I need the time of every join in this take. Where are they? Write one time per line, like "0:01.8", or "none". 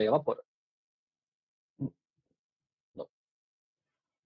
0:03.0